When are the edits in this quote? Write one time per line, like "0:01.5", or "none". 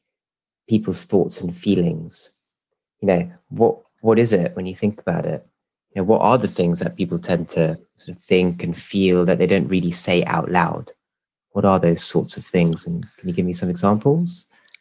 none